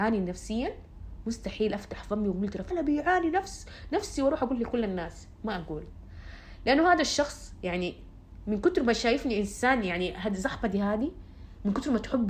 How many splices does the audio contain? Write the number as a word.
one